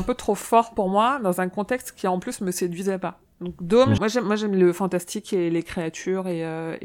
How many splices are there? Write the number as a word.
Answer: one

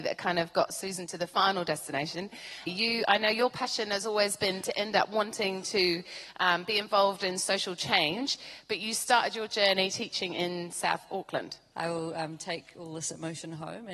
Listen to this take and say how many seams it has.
two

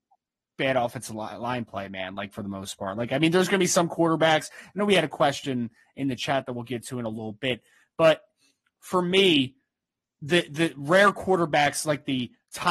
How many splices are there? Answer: zero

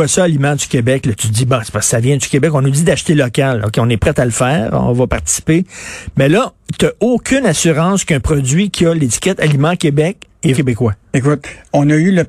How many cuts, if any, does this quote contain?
one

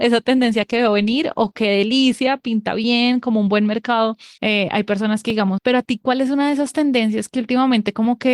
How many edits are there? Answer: two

